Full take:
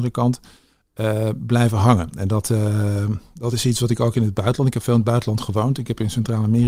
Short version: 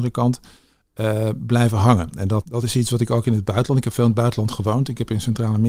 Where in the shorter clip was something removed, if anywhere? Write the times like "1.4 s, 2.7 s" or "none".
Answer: 2.4 s